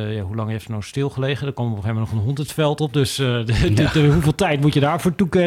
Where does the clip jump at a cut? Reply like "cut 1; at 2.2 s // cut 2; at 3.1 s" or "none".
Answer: none